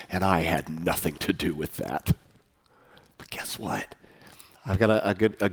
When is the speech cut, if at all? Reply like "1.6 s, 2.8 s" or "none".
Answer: 4.5 s